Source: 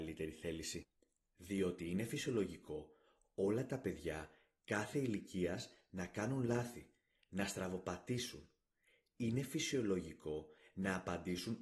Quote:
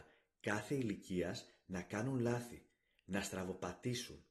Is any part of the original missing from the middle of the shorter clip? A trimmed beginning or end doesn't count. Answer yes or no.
no